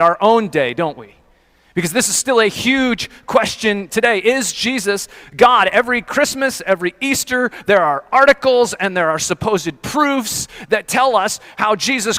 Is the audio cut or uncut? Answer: uncut